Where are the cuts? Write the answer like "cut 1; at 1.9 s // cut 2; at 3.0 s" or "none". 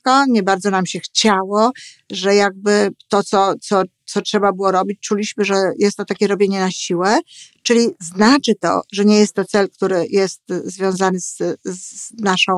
none